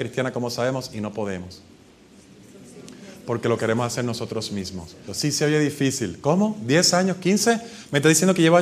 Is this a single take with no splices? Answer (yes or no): no